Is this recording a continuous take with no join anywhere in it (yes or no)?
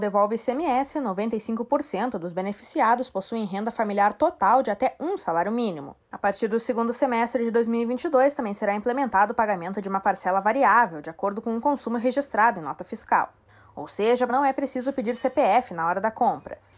no